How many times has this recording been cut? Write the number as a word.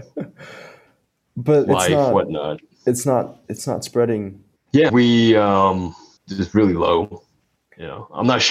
two